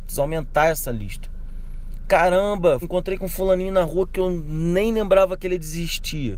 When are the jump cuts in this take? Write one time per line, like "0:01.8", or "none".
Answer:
0:02.8

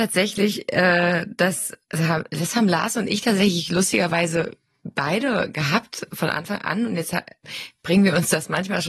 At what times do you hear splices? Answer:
0:01.8

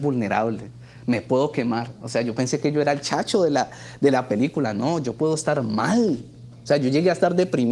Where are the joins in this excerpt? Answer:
none

